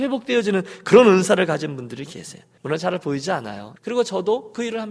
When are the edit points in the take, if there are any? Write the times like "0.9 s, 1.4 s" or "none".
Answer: 2.6 s, 3.8 s